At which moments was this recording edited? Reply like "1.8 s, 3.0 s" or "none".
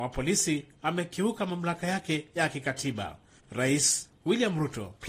3.4 s